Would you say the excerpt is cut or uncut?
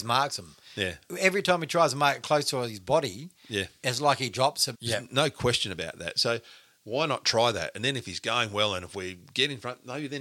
cut